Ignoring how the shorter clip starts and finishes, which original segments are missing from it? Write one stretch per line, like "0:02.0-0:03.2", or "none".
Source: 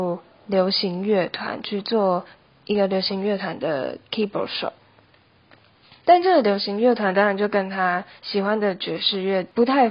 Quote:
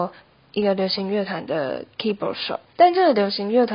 0:04.8-0:06.0

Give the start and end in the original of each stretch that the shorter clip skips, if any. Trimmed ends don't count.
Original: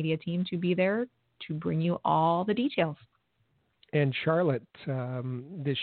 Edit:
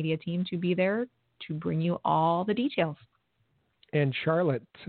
none

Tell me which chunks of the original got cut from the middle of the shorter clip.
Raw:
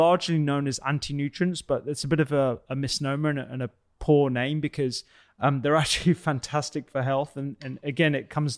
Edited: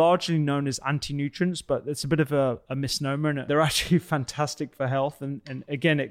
0:03.5-0:05.6

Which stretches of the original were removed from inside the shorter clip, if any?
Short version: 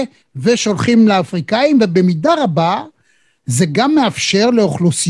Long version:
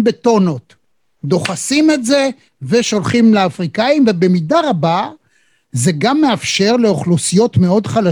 none

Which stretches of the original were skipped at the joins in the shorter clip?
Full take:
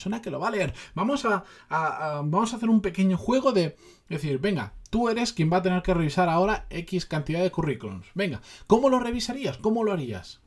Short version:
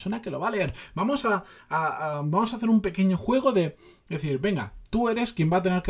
none

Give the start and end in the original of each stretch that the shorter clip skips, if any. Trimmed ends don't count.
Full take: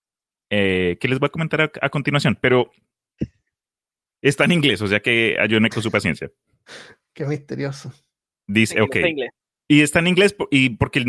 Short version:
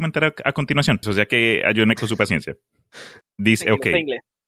0:02.4-0:04.8
0:07.0-0:08.3

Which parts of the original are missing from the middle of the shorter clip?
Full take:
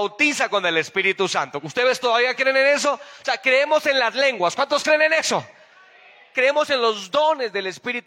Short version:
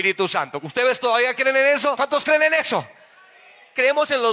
0:03.0-0:04.6

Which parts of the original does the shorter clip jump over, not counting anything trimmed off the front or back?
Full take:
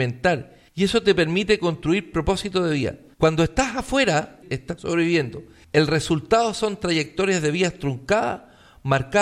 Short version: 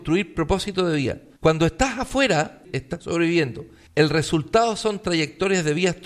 none

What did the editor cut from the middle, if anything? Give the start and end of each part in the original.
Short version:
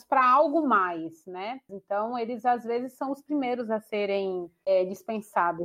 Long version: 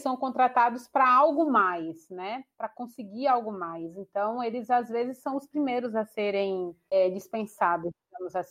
0:02.5-0:03.9

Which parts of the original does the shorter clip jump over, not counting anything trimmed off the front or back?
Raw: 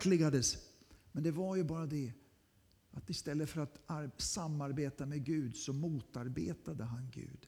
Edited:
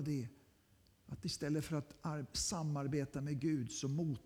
none

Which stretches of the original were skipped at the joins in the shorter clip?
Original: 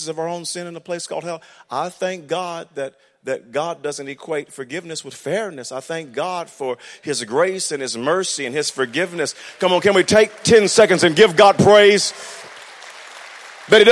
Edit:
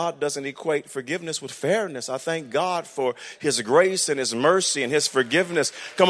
none

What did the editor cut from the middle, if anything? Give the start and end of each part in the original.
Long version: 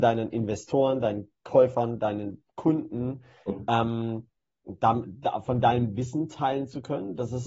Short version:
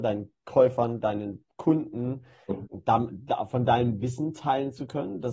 0:03.7-0:04.6

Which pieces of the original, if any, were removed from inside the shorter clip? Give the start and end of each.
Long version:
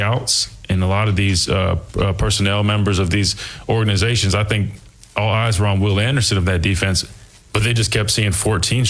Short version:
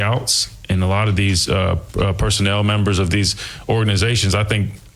none

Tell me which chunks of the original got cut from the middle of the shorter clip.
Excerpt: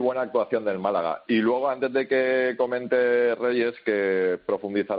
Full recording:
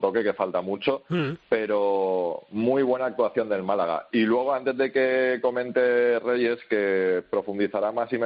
none

